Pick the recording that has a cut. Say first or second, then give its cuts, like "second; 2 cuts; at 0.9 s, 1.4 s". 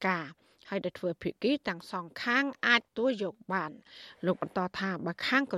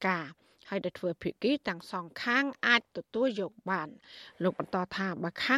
first; 1 cut; at 2.9 s